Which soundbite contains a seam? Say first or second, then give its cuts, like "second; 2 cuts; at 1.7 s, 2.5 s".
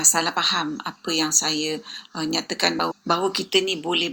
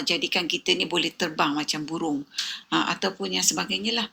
second; 1 cut; at 2.6 s